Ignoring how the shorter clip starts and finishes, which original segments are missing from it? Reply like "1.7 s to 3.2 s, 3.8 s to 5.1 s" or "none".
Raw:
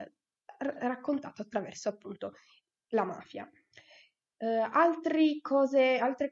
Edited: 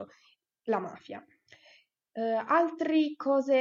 none